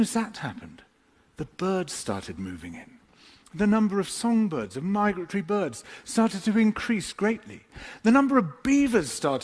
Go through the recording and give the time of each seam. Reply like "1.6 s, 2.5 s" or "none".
none